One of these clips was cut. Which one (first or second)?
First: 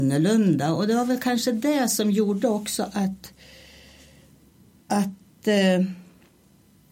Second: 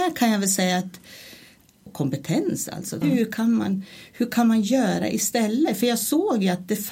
second